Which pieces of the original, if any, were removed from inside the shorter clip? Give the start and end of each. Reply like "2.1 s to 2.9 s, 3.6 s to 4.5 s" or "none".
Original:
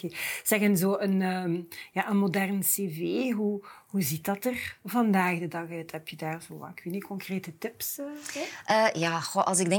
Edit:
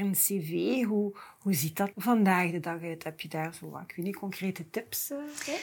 4.4 s to 4.8 s